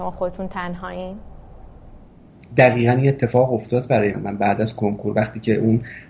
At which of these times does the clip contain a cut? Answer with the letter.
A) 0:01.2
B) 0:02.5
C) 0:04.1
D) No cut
C